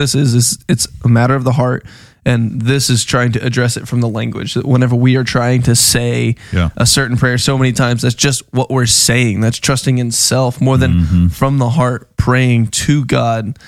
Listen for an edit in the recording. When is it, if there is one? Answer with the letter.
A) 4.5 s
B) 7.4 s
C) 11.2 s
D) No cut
D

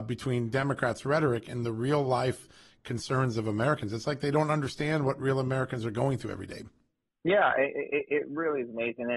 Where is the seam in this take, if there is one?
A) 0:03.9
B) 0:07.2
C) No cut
C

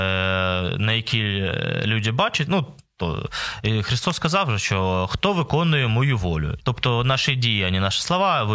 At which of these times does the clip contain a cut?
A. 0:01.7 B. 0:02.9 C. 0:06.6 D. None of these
C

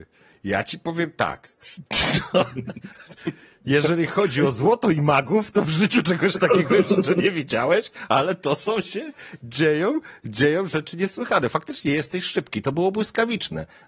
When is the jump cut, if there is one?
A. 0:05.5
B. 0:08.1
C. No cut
C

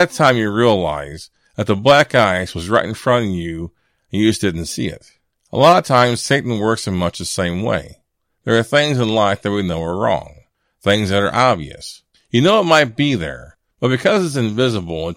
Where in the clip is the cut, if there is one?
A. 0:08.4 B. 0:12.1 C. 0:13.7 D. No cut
B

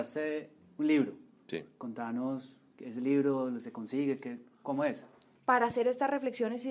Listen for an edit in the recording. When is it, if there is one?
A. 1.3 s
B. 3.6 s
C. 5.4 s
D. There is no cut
C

